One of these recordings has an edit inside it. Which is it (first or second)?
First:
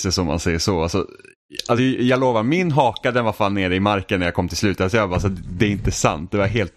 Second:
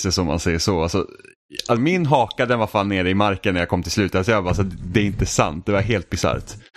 second